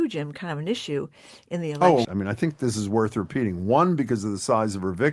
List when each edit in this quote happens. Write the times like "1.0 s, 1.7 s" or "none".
2.0 s